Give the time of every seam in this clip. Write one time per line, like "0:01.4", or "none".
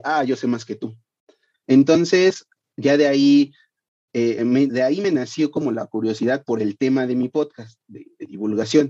0:01.5
0:04.7